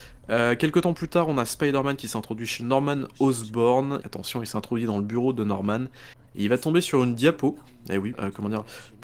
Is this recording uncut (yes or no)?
no